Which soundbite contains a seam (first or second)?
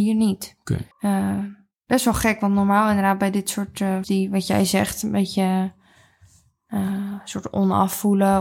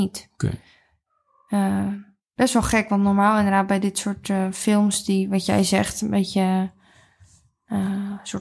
first